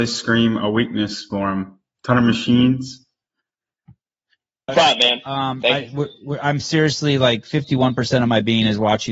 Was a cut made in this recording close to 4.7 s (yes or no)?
yes